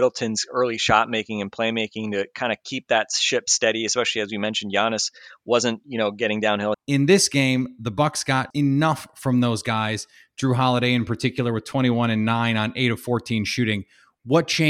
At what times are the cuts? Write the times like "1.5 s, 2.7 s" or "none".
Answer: 6.7 s, 8.5 s

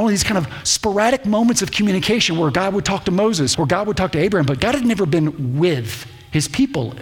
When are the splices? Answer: 3.5 s

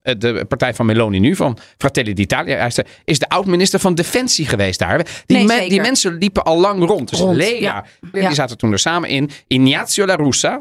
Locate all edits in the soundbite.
8.1 s

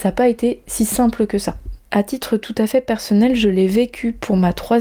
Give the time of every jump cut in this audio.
1.8 s

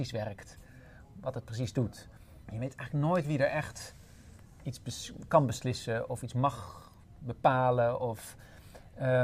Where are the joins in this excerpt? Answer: 2.4 s

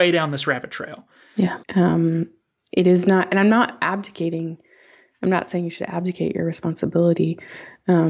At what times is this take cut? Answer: 1.6 s

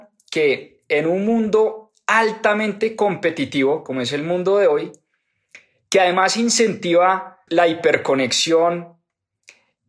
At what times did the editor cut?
7.5 s

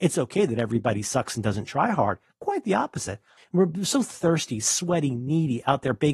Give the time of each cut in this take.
3.4 s

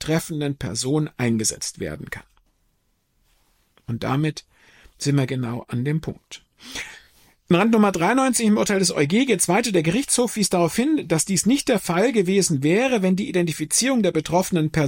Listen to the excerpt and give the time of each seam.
none

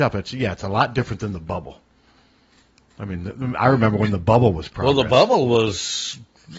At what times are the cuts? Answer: none

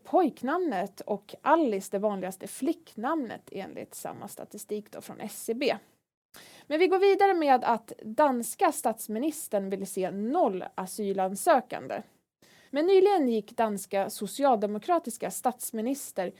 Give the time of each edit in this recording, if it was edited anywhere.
12.7 s

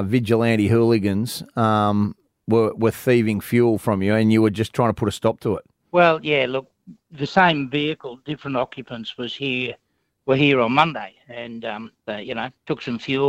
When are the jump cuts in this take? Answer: none

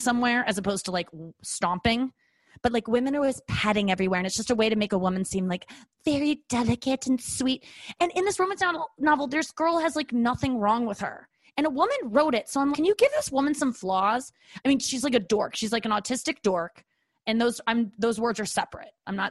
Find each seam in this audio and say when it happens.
12.7 s

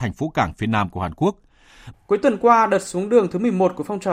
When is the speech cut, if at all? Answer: 1.9 s

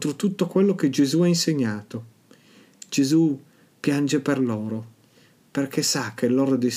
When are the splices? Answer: 2.8 s, 5.4 s

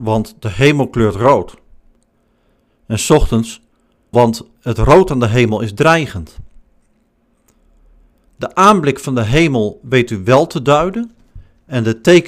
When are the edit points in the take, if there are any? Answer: 4.1 s

